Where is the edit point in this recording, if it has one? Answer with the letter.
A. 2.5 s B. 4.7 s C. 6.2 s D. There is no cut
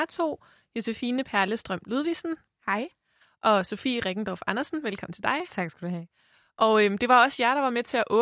A